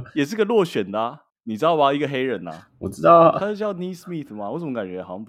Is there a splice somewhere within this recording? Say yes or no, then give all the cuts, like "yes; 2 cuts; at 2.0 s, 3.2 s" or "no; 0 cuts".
no; 0 cuts